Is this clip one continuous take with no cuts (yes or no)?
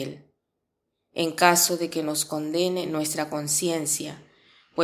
yes